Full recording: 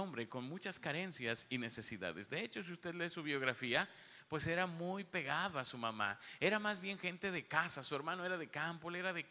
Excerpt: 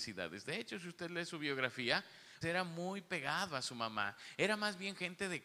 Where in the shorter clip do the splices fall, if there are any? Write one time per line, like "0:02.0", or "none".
0:02.4